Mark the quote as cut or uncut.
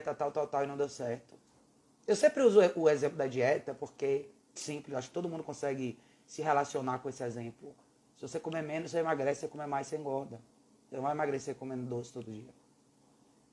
cut